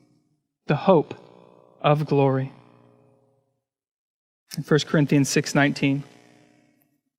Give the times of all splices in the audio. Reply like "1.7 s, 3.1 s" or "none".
none